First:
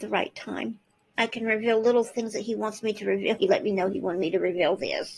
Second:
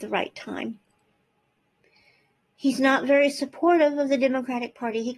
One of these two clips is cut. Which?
first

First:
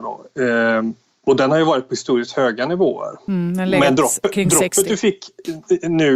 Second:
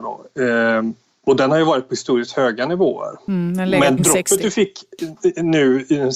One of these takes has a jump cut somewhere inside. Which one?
second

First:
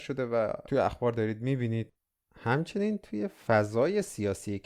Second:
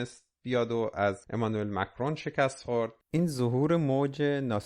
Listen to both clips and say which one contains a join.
second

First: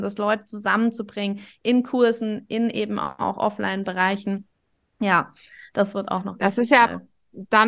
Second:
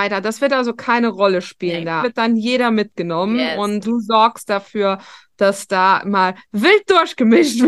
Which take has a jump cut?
second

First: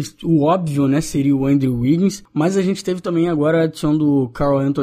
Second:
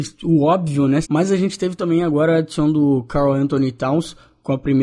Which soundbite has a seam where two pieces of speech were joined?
second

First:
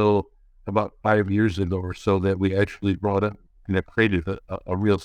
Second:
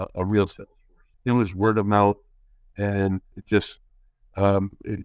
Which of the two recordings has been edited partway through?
second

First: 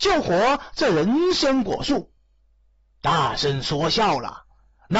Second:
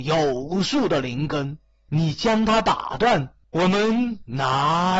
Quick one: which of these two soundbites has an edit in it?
second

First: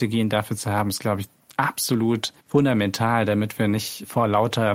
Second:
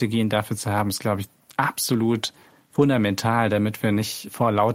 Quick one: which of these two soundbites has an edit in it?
first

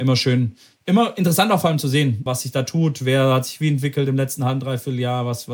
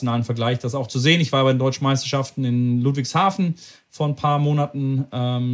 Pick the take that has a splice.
first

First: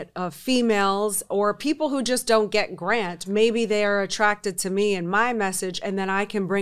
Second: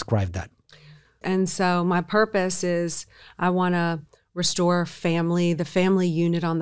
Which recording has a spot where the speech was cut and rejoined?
second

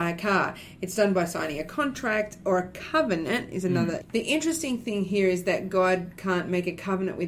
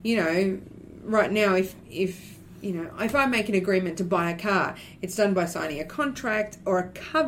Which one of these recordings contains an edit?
first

